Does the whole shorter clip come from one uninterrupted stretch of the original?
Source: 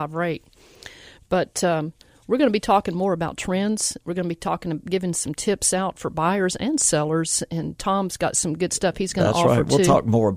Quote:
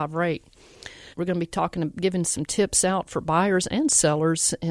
no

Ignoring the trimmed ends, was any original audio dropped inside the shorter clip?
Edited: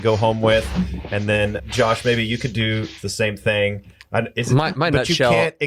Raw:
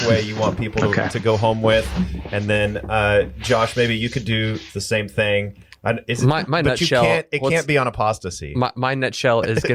yes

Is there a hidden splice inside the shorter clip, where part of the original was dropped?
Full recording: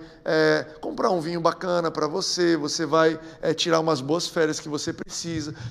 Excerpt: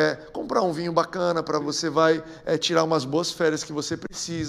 yes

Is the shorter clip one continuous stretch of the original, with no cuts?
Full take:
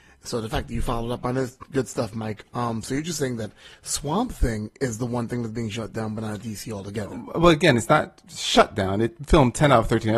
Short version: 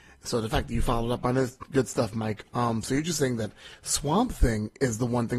yes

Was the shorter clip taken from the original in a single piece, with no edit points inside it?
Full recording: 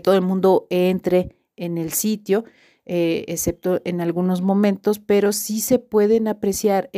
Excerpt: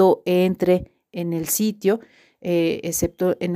yes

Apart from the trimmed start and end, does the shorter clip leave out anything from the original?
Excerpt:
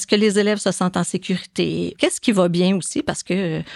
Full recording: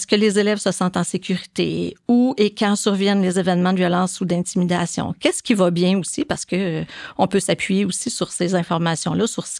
yes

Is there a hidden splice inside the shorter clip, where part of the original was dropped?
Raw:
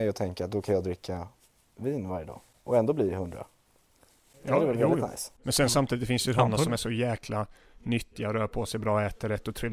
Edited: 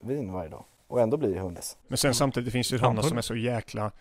yes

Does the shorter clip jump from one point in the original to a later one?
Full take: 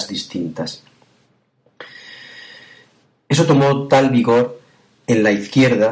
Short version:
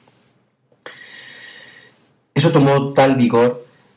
no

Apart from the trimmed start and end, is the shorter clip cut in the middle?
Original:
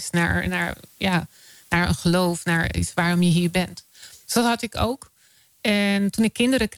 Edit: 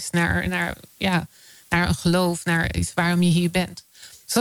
no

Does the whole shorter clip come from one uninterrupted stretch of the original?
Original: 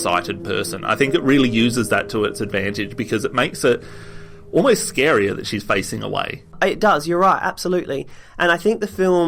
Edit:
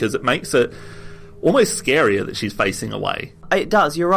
yes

